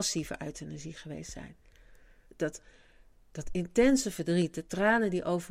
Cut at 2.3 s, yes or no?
yes